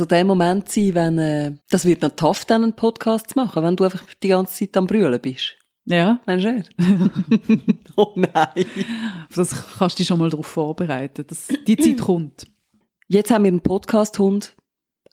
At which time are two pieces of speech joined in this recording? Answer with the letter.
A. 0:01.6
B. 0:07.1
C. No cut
A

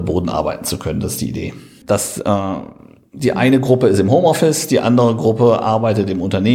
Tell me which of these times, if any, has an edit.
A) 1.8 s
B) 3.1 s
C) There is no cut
A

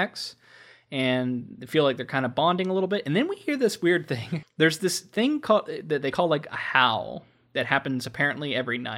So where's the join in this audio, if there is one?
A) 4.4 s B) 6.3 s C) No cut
A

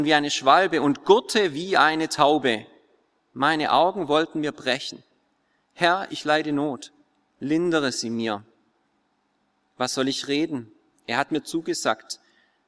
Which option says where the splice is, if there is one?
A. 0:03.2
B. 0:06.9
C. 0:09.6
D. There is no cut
D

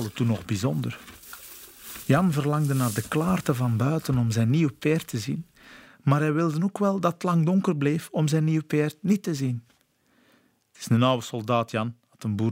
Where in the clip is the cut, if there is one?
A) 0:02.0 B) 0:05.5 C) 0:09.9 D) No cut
A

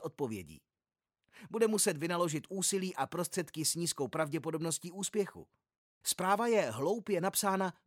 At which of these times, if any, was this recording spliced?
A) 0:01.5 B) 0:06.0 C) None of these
B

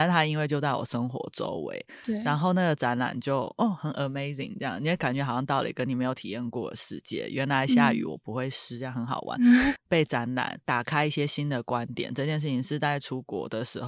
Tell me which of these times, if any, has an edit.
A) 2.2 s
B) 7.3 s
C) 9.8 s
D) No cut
C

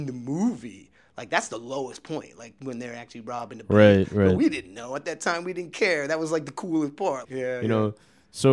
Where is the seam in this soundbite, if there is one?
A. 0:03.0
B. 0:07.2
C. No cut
B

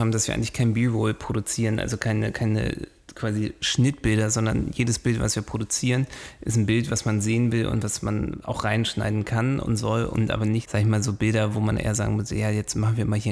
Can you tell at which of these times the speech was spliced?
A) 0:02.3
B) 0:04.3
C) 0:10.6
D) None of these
C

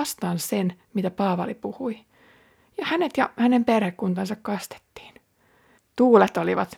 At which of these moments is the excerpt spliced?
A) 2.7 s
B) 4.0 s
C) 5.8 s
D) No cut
C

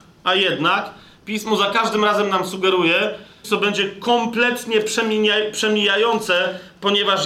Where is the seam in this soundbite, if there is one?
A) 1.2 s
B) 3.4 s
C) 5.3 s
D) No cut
B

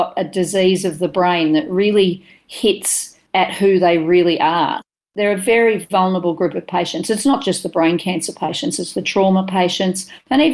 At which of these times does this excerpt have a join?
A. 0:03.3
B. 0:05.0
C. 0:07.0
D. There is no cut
D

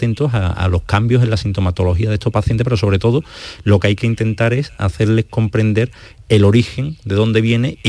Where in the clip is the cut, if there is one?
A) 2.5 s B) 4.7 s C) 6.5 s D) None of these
D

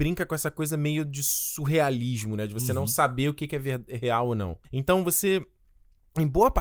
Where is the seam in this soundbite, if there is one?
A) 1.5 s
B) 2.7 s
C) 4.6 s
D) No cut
C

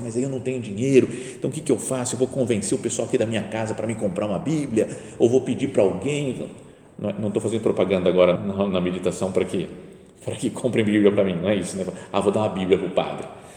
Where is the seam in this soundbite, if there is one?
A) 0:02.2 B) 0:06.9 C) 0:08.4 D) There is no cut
C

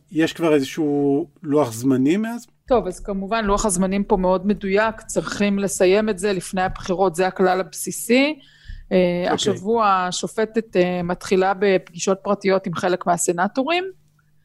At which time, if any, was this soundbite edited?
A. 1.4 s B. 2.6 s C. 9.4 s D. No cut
A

